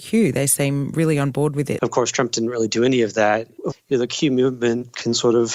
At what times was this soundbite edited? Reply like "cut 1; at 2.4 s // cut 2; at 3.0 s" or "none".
cut 1; at 1.8 s // cut 2; at 3.7 s